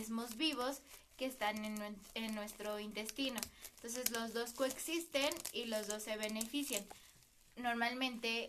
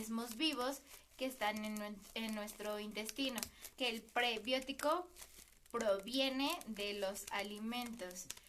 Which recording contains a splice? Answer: second; 1 cut; at 3.7 s

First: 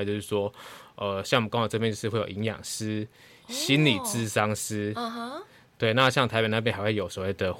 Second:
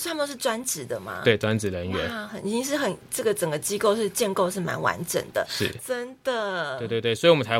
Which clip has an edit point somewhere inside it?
second; 2 cuts; at 2.3 s, 5.8 s

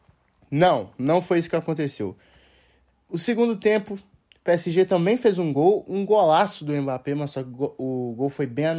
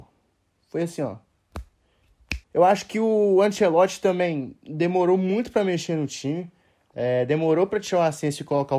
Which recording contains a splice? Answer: second; 1 cut; at 2.4 s

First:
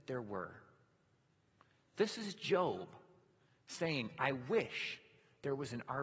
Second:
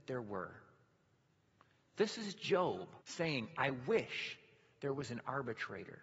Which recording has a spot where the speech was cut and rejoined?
second; 1 cut; at 3.0 s

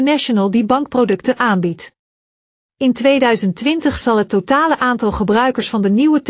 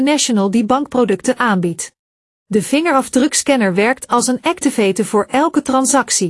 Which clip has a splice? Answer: second; 1 cut; at 2.5 s

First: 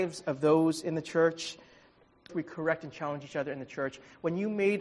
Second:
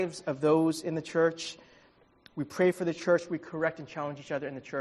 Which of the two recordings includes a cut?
first; 1 cut; at 2.3 s

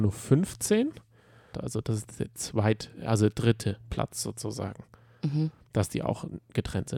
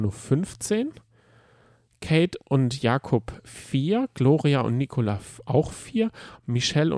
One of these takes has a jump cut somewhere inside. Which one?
first; 1 cut; at 1.5 s

